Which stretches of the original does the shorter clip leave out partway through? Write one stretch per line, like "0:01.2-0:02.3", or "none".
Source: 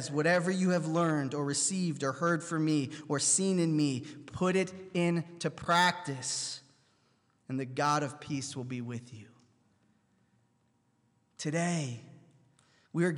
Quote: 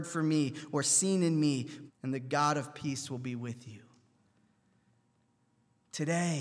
0:04.2-0:07.3